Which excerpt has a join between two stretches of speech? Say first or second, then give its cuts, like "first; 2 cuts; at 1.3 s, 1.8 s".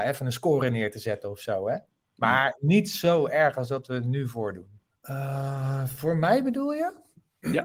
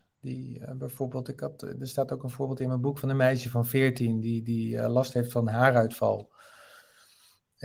first; 1 cut; at 4.9 s